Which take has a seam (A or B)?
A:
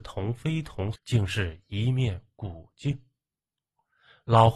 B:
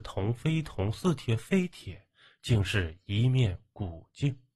A